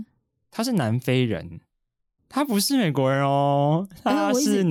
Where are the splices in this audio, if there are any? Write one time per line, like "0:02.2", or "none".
0:02.2